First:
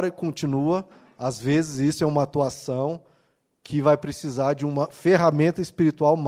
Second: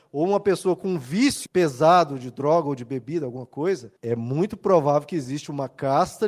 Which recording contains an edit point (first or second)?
second